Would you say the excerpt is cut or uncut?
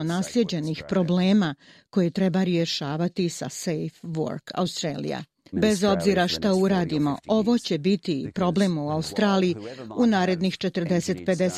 cut